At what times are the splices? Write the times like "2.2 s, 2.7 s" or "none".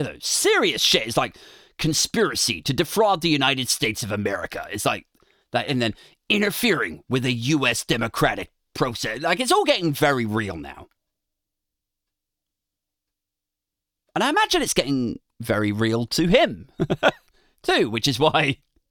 none

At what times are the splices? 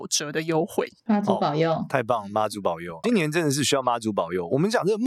1.0 s, 3.0 s

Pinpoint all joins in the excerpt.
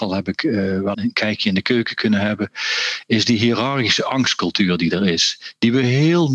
0.9 s

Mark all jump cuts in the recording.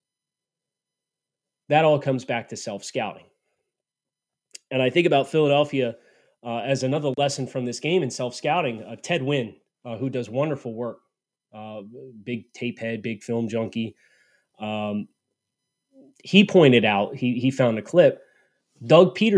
none

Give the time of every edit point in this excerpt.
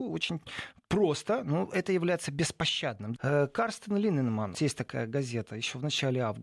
3.2 s, 4.5 s

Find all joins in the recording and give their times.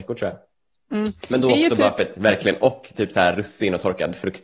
2.1 s

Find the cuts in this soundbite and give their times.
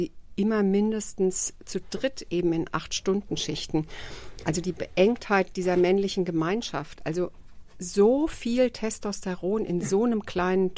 none

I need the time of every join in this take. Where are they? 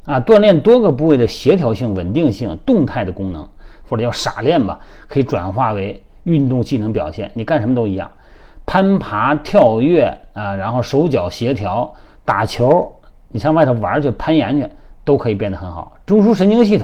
3.8 s

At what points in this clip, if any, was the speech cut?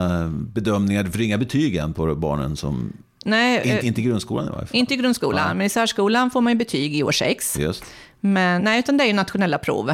3.8 s, 8.6 s

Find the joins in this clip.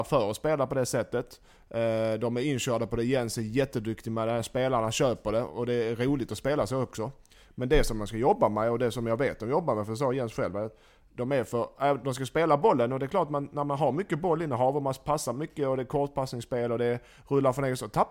none

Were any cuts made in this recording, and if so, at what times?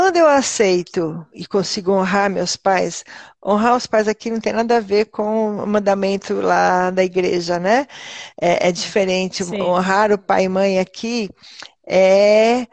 1.3 s

